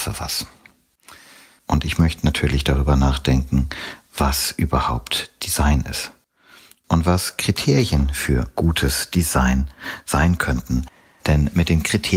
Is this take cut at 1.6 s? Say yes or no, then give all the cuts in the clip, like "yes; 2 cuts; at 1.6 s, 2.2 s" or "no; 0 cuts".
yes; 1 cut; at 1.6 s